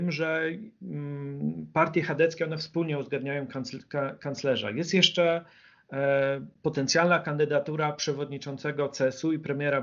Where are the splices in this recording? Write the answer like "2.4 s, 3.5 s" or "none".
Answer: none